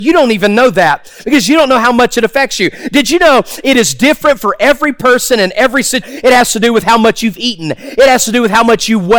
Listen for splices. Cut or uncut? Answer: cut